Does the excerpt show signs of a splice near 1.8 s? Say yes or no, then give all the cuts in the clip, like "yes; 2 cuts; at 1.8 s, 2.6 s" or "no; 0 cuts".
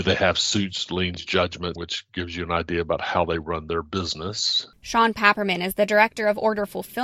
yes; 1 cut; at 1.8 s